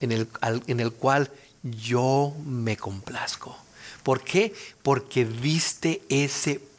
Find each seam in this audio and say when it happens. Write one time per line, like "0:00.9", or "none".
none